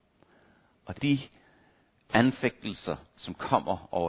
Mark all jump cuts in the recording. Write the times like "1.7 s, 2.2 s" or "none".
1.0 s